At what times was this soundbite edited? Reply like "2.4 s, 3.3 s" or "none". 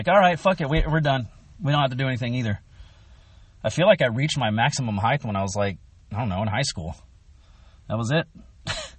none